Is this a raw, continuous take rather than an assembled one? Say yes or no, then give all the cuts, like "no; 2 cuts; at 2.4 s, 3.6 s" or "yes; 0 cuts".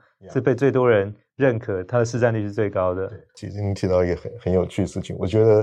yes; 0 cuts